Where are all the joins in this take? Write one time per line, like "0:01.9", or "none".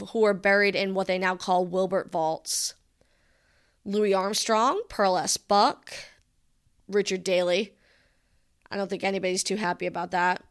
none